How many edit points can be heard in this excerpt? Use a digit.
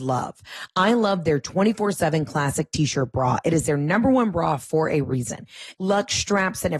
1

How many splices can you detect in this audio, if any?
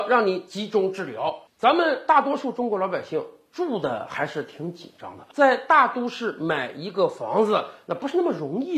0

